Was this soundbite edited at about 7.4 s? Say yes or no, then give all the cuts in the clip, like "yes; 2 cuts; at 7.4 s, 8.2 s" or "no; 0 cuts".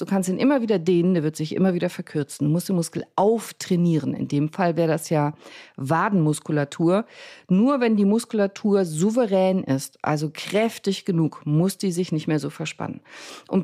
no; 0 cuts